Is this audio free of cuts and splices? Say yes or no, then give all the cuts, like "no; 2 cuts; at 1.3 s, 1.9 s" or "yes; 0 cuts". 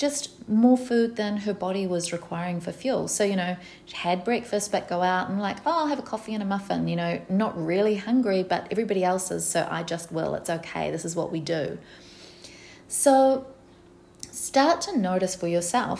yes; 0 cuts